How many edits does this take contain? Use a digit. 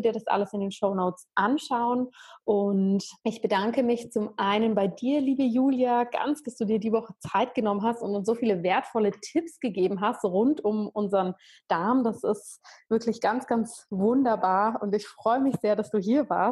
2